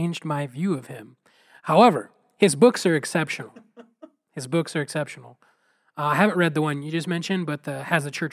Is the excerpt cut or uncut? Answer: uncut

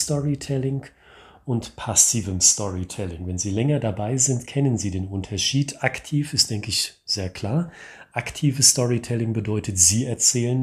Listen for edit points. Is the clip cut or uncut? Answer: uncut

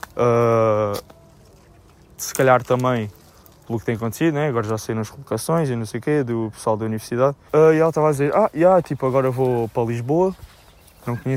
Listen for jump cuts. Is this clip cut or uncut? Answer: cut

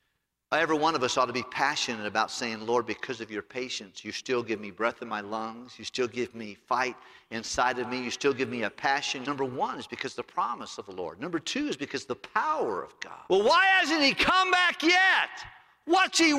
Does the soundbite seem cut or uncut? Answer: cut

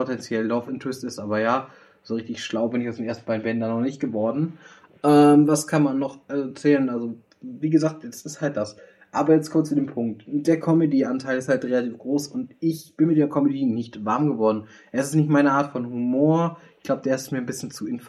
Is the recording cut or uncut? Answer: uncut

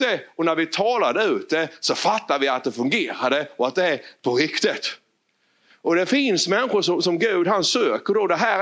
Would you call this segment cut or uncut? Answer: uncut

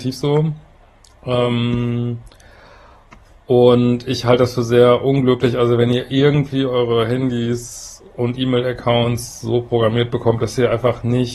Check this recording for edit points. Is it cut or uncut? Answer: uncut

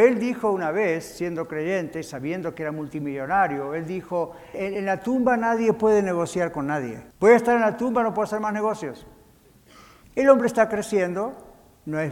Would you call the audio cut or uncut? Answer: cut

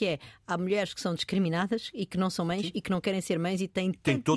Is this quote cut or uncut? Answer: uncut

